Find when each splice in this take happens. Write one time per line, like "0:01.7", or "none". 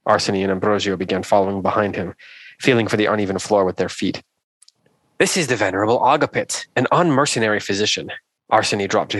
0:05.0